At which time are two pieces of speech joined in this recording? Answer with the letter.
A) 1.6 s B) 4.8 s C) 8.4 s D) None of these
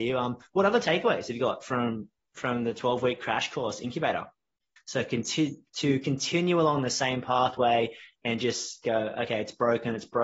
B